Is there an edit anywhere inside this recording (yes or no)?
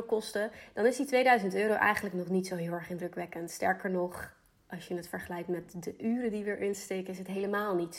no